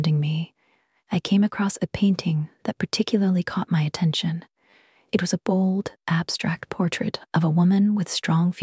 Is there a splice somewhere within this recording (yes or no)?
no